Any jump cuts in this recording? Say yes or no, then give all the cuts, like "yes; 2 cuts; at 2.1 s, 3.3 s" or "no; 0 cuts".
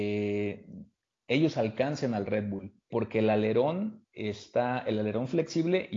yes; 1 cut; at 2.9 s